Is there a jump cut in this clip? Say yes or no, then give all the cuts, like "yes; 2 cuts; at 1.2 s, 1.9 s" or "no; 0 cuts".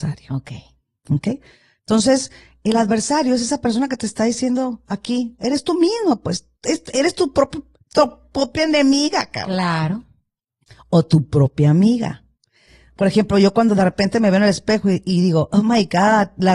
no; 0 cuts